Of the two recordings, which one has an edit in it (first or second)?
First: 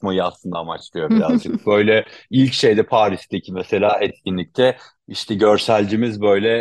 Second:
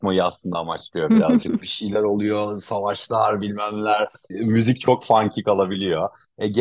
second